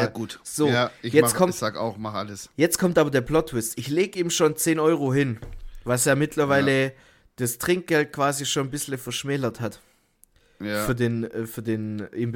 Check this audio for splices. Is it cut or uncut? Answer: uncut